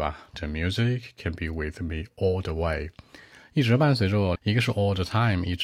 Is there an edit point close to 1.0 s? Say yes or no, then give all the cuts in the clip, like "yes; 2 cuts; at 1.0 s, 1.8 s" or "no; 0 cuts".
no; 1 cut; at 4.4 s